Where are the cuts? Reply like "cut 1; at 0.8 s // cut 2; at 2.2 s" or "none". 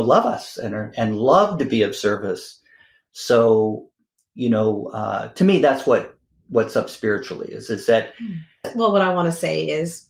cut 1; at 8.6 s

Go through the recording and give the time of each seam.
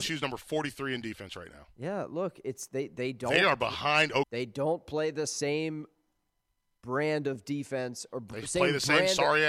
cut 1; at 4.2 s

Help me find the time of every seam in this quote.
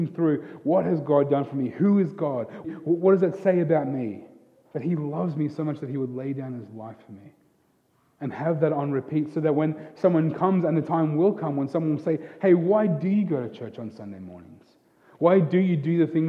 cut 1; at 2.6 s

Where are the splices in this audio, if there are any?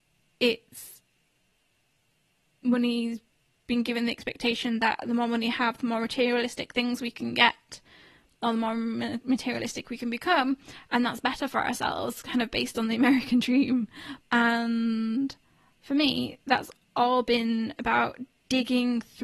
cut 1; at 14.2 s

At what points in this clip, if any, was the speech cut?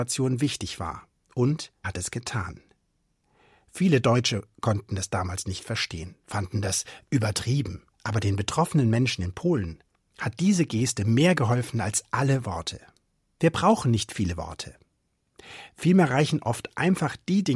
cut 1; at 1.8 s // cut 2; at 7.9 s // cut 3; at 13.4 s

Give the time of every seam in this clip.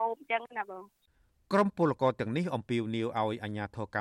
none

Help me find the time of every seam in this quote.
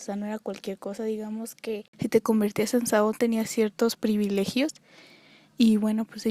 none

